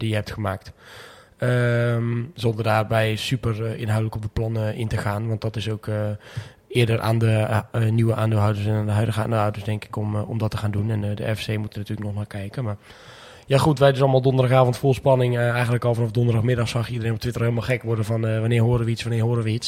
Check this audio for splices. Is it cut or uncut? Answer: uncut